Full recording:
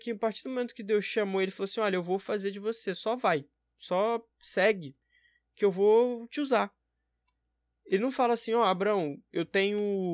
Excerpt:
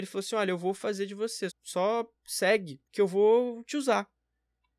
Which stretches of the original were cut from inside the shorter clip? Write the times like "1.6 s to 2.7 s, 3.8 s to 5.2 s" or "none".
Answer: 2.9 s to 3.6 s, 5.0 s to 5.5 s